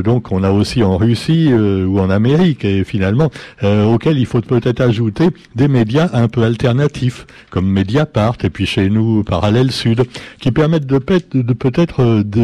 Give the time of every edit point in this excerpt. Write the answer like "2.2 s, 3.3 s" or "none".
none